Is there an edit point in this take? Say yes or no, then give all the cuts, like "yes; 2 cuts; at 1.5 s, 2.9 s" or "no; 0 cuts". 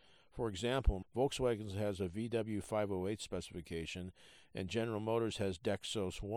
yes; 1 cut; at 1.0 s